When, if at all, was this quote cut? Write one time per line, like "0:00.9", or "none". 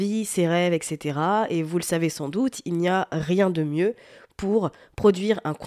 none